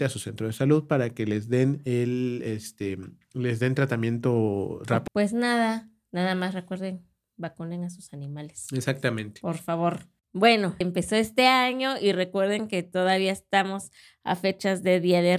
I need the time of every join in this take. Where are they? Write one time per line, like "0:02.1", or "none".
0:05.1
0:10.8